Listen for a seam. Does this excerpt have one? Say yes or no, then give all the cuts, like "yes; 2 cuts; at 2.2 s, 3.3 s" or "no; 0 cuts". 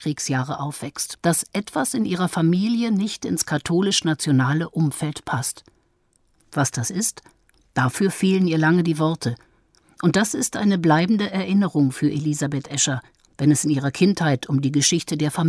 yes; 1 cut; at 1.1 s